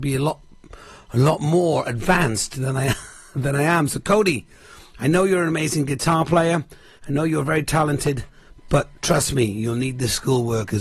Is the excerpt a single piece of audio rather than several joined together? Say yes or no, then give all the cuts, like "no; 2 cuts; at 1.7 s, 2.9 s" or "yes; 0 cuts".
yes; 0 cuts